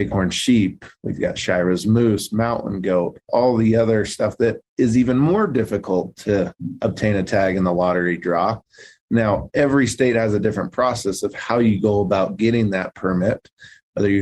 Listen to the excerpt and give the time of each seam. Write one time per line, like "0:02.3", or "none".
0:09.0